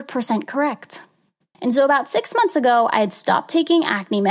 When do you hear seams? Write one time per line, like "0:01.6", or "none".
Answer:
0:01.5